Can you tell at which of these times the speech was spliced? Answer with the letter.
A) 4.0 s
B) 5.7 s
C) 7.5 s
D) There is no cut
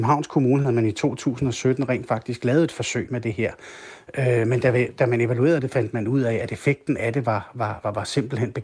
D